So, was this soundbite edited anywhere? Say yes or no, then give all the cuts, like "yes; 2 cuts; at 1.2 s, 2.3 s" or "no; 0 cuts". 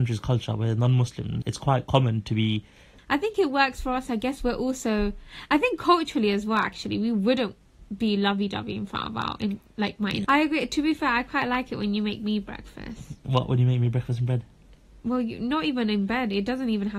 yes; 3 cuts; at 1.4 s, 3.0 s, 10.2 s